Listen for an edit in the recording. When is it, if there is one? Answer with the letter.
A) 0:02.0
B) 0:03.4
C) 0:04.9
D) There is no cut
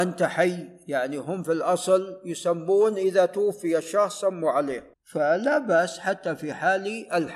C